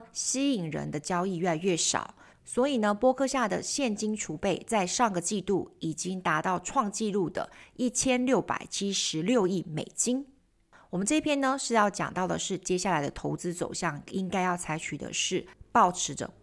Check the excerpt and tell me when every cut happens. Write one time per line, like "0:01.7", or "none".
none